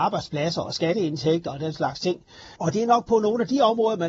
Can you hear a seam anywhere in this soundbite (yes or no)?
yes